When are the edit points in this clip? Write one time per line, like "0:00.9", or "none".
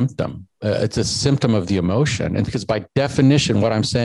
0:02.5

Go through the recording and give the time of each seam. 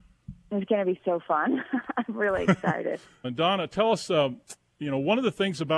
0:03.2

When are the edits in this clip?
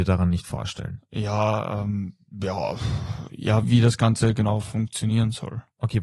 0:03.6

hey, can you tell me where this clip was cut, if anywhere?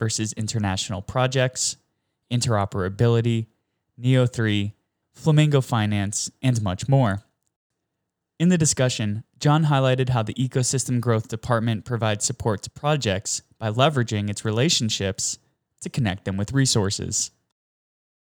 0:05.0

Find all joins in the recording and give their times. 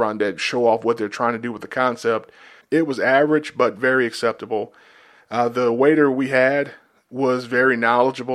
0:02.6

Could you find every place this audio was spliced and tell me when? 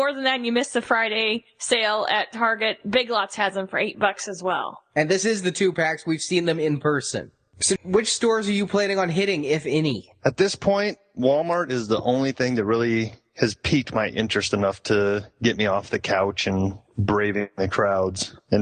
0:07.8

